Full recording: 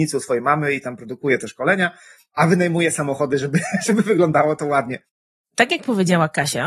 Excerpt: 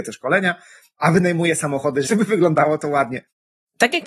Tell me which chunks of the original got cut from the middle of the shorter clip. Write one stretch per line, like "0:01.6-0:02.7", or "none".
0:03.4-0:03.8